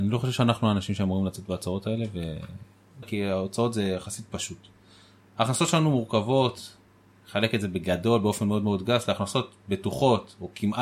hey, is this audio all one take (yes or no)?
no